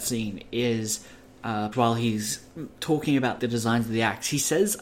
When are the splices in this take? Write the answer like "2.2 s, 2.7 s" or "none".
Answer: 1.7 s, 3.4 s

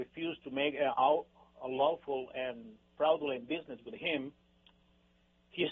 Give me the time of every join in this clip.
none

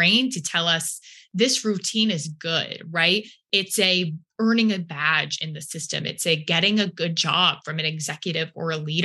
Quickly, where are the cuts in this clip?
none

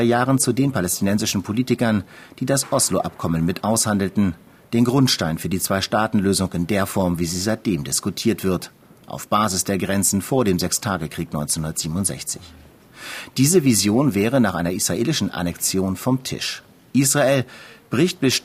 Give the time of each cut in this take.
none

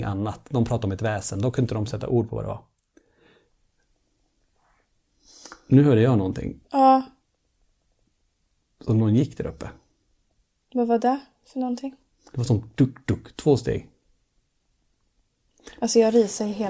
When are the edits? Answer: none

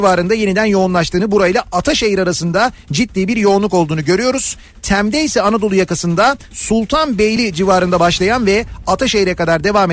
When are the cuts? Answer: none

